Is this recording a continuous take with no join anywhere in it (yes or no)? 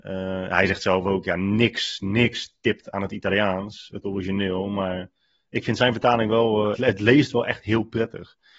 no